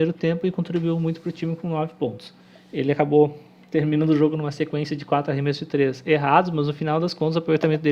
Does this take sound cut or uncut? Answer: uncut